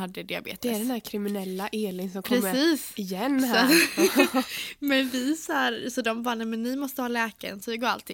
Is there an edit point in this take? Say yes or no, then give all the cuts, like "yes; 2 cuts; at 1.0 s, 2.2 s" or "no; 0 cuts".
no; 0 cuts